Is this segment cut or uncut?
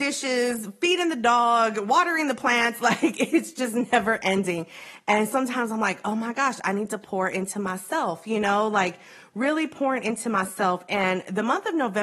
uncut